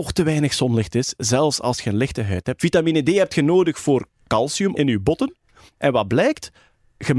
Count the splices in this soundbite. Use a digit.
2